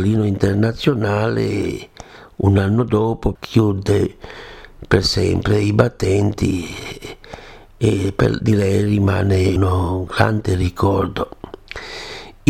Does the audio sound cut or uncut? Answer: cut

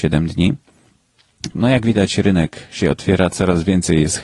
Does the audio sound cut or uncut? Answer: cut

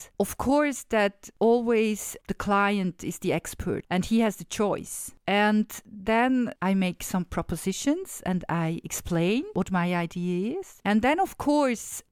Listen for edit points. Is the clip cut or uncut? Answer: uncut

